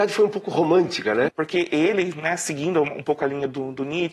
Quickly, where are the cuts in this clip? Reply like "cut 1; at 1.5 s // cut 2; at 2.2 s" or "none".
cut 1; at 1.3 s

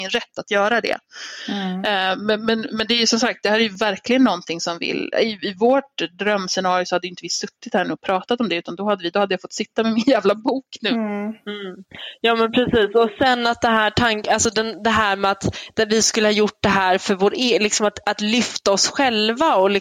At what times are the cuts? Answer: none

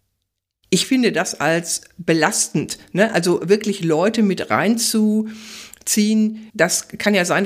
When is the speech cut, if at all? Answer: cut 1; at 6.5 s

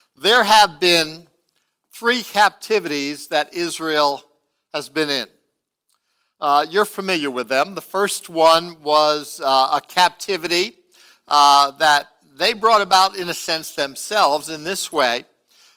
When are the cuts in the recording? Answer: none

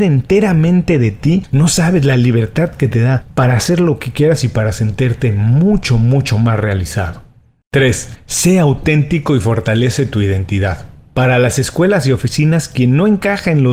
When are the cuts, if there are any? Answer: none

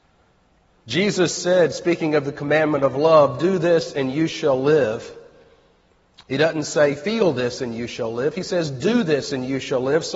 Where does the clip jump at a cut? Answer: none

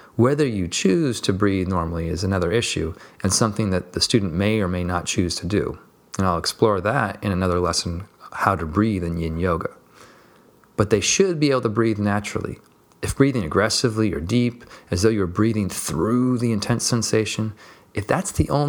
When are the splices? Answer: none

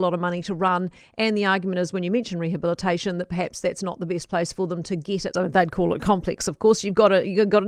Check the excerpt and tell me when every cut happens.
cut 1; at 5.3 s

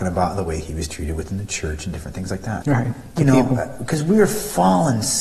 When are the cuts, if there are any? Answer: cut 1; at 2.6 s

